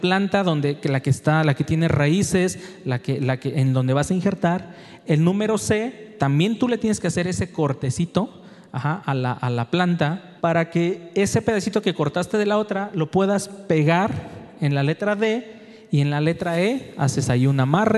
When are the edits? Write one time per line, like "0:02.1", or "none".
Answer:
0:10.4